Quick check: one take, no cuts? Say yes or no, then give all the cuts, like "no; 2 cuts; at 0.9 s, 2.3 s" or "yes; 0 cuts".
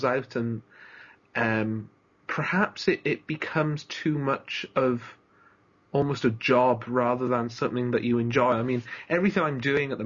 yes; 0 cuts